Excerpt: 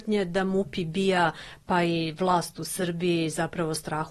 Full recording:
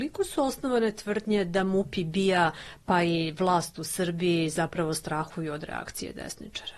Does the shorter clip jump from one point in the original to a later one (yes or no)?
no